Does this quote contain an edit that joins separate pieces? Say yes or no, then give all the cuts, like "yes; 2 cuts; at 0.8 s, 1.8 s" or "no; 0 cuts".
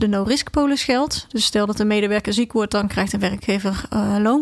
no; 0 cuts